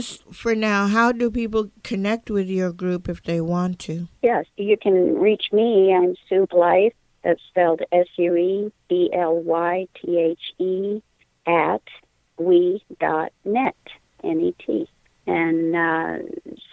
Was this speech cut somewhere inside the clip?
no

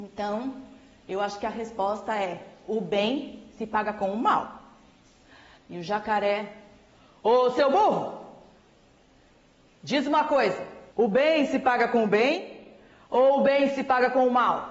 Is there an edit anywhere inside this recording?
yes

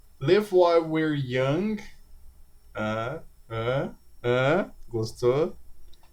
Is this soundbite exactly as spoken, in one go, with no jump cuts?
yes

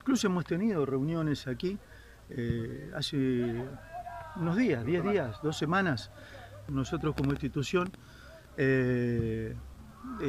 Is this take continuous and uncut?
no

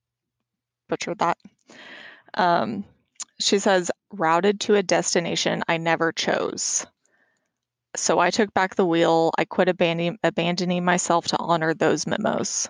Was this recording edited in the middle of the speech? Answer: yes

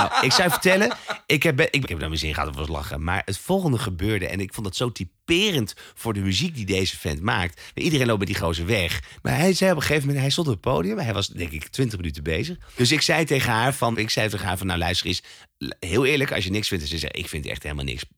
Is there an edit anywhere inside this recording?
yes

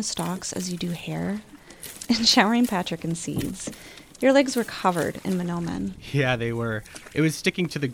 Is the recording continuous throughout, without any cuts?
yes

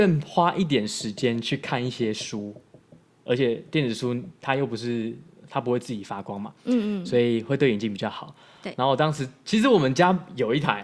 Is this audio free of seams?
yes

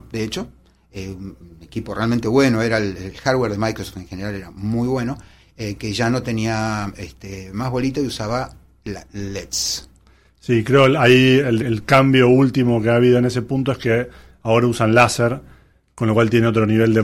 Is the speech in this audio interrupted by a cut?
yes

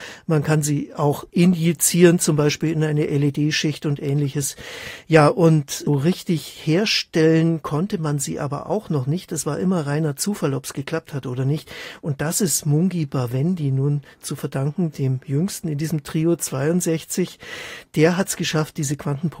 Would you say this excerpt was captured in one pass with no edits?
no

